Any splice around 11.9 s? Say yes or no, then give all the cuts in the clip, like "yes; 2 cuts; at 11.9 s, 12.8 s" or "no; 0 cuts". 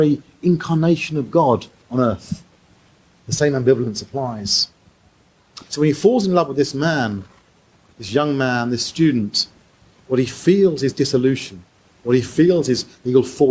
no; 1 cut; at 5.7 s